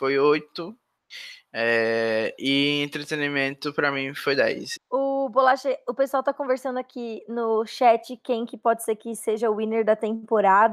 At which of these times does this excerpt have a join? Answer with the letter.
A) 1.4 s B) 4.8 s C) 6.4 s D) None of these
B